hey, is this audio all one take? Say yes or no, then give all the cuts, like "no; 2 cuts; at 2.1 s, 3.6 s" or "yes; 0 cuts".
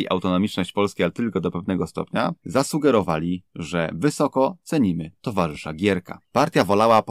yes; 0 cuts